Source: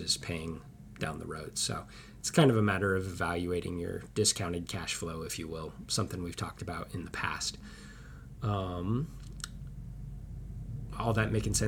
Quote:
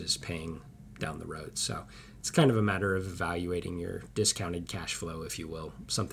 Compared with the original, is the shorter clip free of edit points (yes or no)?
yes